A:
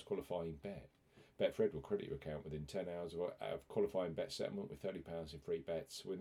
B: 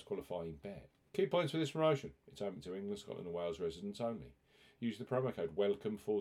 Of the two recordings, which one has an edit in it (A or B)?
B